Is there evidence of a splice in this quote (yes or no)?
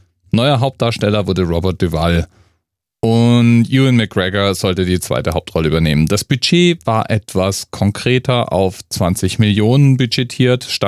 no